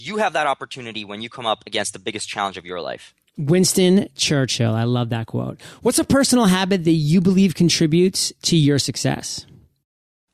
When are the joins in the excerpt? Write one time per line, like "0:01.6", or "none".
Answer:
none